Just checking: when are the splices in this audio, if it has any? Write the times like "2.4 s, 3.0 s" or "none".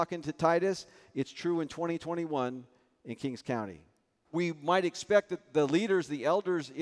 4.2 s